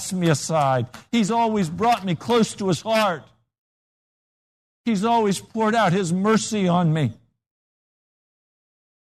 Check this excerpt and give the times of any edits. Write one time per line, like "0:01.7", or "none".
none